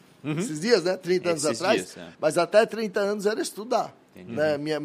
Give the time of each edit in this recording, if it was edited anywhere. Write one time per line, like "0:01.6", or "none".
0:02.1